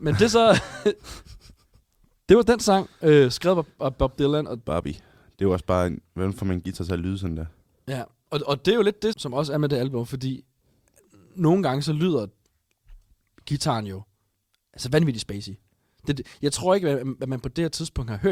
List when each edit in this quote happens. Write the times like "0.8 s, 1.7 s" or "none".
9.1 s